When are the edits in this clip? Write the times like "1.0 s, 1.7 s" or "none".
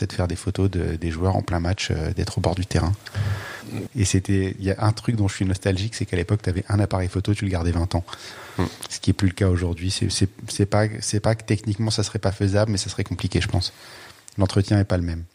3.9 s

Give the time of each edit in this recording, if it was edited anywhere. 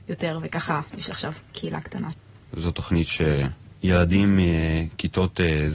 2.5 s

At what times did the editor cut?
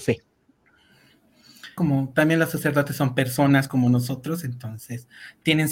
1.8 s

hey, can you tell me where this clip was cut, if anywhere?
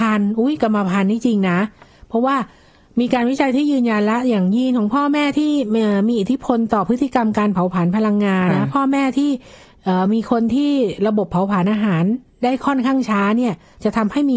8.5 s

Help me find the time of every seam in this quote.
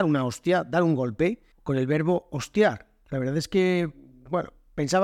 1.5 s

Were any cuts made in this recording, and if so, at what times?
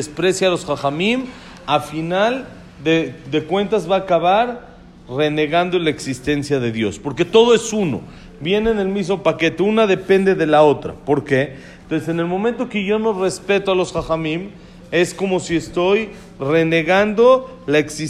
11.8 s

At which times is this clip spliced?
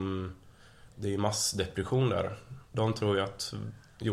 0.9 s

